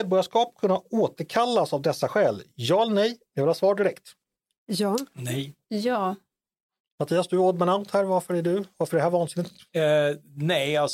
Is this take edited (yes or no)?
no